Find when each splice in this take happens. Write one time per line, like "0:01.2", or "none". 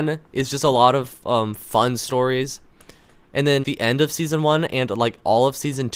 0:03.6